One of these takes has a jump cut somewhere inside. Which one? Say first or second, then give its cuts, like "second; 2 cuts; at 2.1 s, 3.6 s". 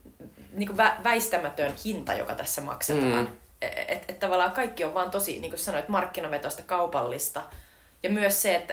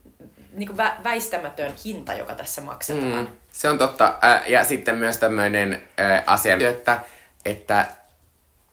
second; 2 cuts; at 3.5 s, 6.6 s